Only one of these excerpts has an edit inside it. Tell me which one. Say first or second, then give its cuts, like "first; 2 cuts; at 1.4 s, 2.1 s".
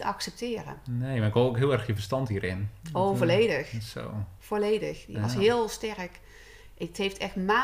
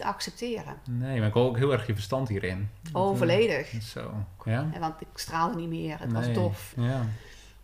second; 2 cuts; at 4.4 s, 6.7 s